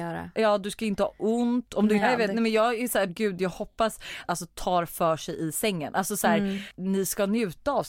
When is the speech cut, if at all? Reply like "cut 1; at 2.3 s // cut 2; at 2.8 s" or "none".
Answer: cut 1; at 2.0 s // cut 2; at 3.1 s // cut 3; at 4.2 s